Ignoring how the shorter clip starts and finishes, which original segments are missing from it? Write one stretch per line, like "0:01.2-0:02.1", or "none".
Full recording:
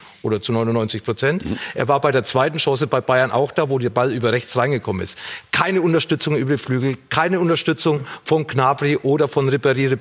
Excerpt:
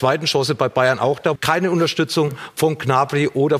0:03.7-0:07.0